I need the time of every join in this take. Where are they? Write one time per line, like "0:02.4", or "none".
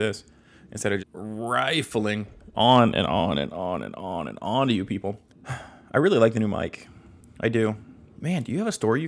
0:01.0
0:05.3